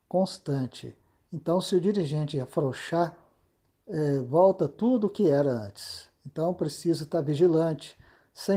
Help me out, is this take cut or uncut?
uncut